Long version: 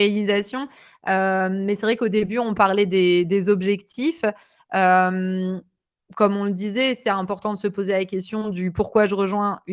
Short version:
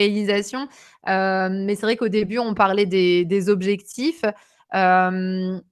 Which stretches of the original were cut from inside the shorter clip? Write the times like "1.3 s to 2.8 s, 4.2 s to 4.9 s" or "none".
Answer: none